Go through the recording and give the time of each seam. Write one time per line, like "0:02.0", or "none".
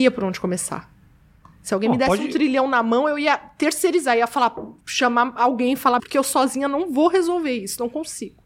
0:04.8
0:06.0